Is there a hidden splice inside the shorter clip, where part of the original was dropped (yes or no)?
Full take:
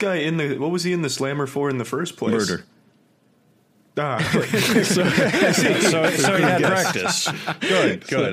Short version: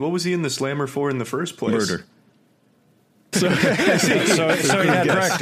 yes